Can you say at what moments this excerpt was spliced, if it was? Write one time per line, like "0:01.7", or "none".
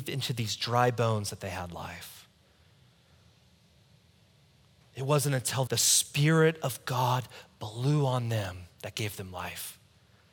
0:05.7